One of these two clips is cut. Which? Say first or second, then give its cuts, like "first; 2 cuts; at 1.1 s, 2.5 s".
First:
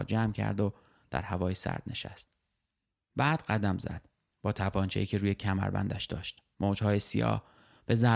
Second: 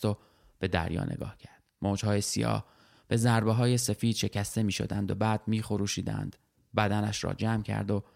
first; 2 cuts; at 4.3 s, 6.5 s